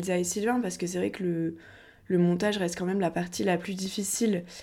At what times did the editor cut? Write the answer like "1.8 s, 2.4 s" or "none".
none